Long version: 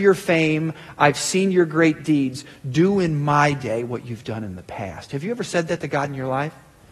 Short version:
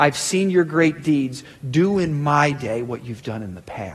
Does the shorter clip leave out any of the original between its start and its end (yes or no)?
no